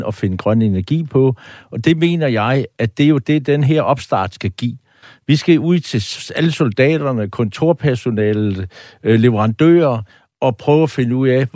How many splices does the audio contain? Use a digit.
0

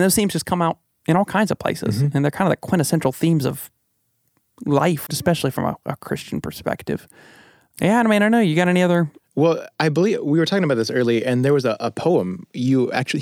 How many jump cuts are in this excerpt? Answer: 1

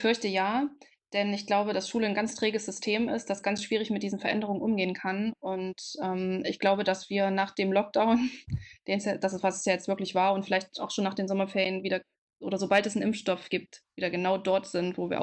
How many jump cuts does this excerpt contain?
0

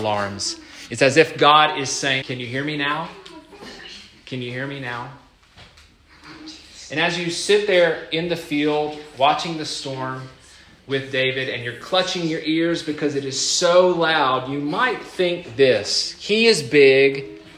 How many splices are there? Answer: 1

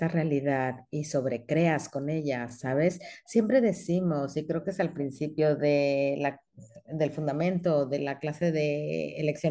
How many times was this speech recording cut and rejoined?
0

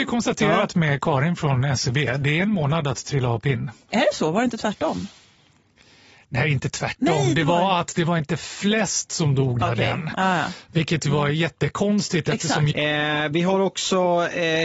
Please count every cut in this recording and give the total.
2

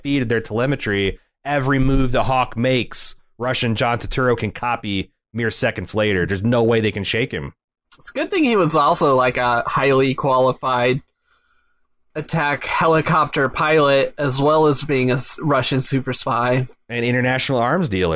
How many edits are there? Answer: 1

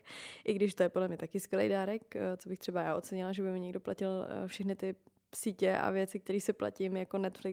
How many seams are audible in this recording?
0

